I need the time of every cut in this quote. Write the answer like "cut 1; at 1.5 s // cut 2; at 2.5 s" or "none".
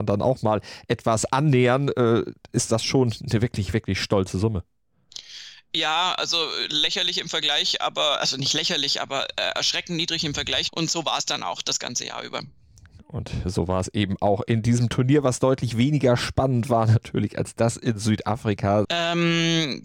cut 1; at 10.7 s // cut 2; at 18.8 s